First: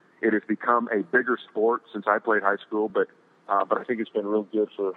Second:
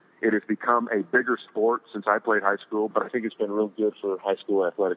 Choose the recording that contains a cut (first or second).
second